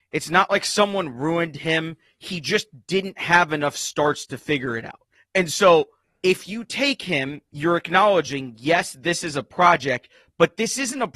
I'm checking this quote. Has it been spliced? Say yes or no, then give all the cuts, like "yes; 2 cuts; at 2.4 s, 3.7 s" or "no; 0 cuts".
no; 0 cuts